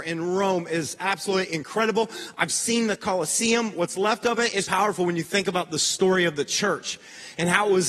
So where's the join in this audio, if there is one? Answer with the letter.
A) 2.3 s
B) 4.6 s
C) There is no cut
B